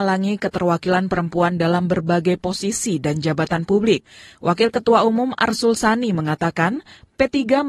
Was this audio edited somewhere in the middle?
no; 0 cuts

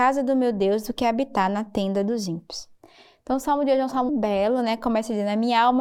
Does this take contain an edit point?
yes; 1 cut; at 4.1 s

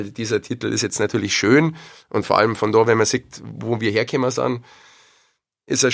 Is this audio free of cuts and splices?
yes; 0 cuts

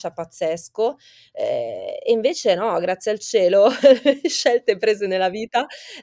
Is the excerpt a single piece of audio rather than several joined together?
yes; 0 cuts

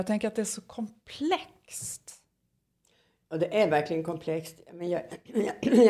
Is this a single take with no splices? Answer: yes; 0 cuts

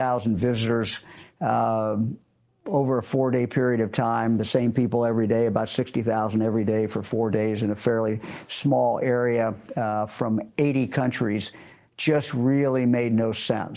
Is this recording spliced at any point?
no; 0 cuts

